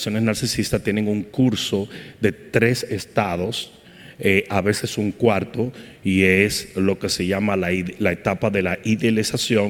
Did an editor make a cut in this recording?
no; 0 cuts

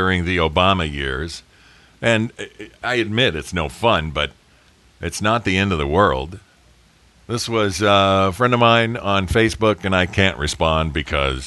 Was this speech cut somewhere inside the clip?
yes; 1 cut; at 7.1 s

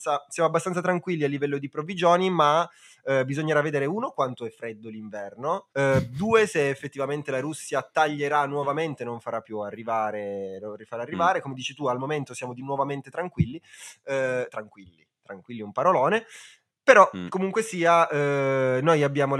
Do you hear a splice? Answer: yes; 1 cut; at 5.7 s

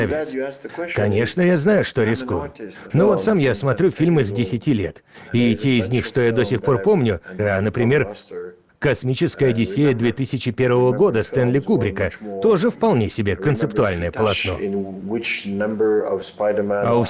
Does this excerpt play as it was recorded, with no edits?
no; 2 cuts; at 2.9 s, 7.4 s

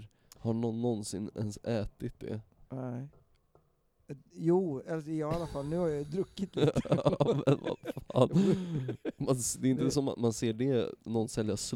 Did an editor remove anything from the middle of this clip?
no; 0 cuts

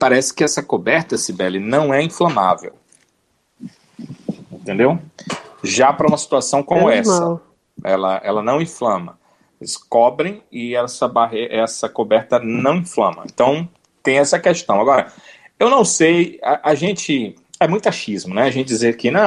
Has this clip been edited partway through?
no; 0 cuts

